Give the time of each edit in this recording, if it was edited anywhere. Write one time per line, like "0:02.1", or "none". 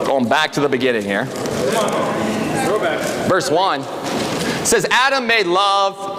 none